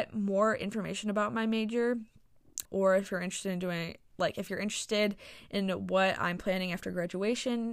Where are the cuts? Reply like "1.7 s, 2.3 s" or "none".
2.6 s